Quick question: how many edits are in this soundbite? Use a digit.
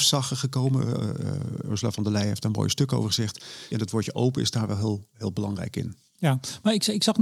1